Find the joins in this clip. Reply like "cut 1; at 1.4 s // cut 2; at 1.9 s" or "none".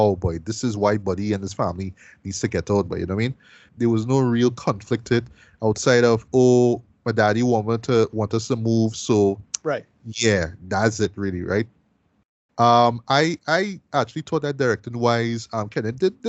cut 1; at 3.7 s // cut 2; at 12.5 s